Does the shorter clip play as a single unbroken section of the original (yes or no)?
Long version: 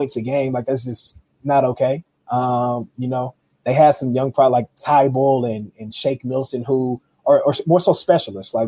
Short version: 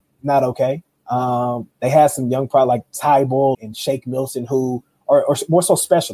no